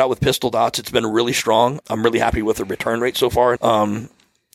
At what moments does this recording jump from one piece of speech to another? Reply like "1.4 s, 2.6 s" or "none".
1.8 s, 3.6 s